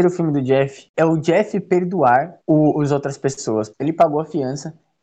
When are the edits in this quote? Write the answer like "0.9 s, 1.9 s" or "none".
0.9 s, 3.7 s

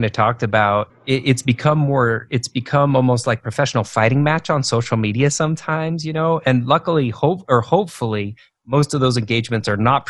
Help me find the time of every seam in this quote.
none

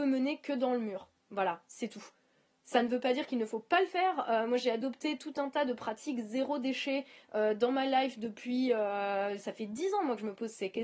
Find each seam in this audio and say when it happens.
none

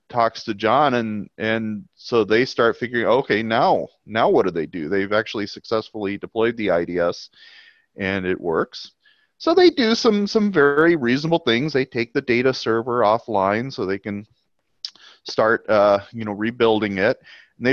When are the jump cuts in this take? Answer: none

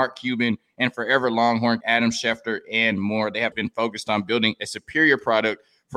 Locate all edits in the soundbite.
1.8 s, 3.5 s

